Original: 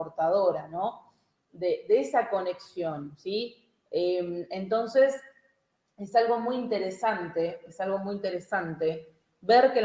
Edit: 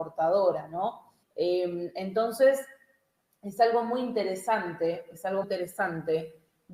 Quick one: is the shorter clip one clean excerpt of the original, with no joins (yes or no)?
no